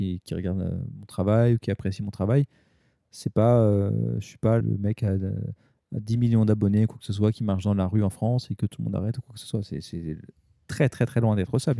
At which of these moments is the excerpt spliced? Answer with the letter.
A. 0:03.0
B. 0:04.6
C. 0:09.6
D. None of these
B